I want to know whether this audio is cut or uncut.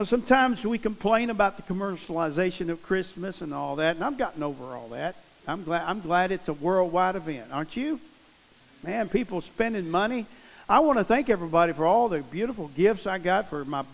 cut